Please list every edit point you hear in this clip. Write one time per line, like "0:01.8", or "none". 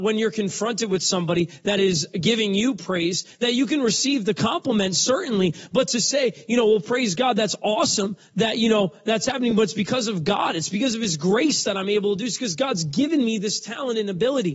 none